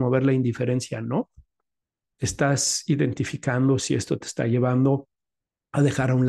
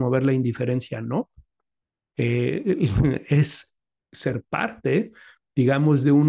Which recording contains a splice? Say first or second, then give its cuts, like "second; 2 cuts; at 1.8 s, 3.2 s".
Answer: first; 1 cut; at 2.0 s